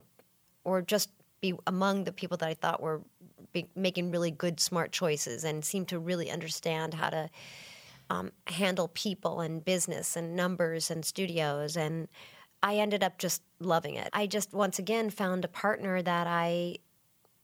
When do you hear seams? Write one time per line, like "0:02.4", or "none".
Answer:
0:14.1

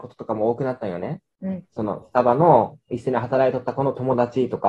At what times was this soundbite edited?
none

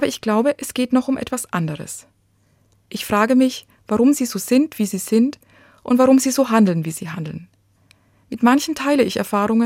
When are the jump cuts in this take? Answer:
0:02.8

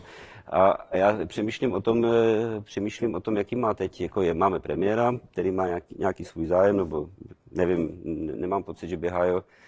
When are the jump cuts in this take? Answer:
none

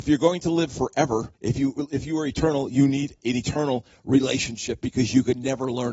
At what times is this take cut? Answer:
0:01.4

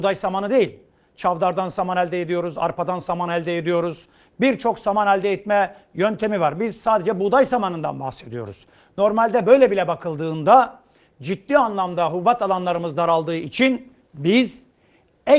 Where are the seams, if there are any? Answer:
none

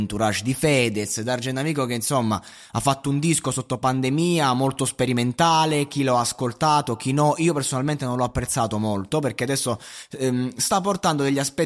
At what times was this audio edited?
none

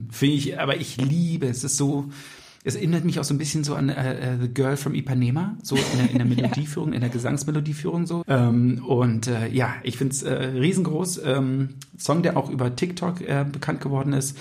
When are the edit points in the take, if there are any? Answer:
0:08.2

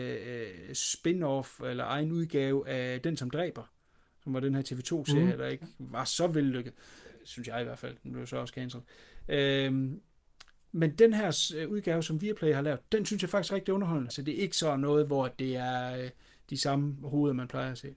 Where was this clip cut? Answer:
0:14.1

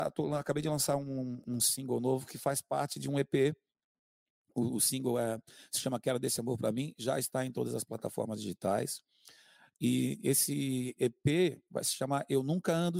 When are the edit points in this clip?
none

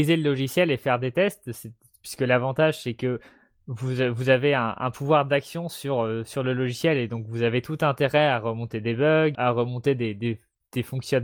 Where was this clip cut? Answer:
0:09.3

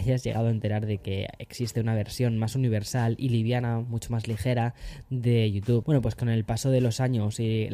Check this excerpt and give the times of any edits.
0:05.8

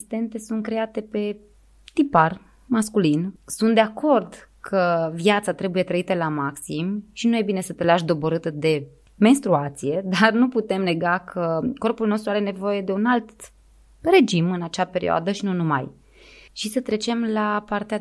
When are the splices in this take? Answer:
0:03.4
0:16.5

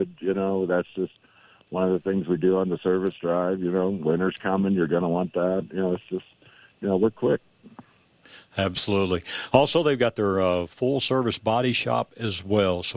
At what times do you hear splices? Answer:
none

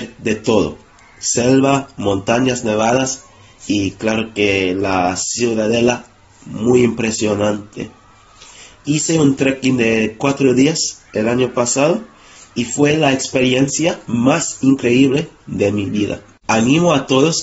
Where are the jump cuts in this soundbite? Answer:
none

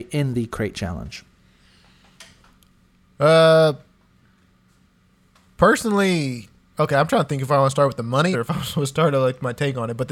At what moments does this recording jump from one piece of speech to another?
0:08.3

